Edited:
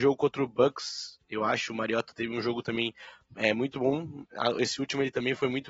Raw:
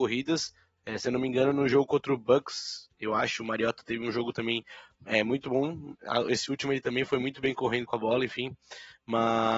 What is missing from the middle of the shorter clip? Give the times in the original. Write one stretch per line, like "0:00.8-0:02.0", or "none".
none